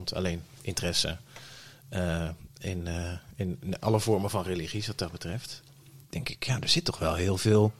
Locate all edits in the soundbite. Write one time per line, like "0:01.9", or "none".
none